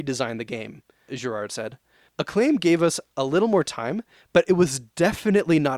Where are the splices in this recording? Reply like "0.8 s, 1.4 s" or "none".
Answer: none